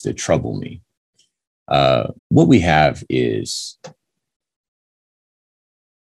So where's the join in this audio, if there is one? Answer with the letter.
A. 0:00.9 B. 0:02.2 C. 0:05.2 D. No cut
B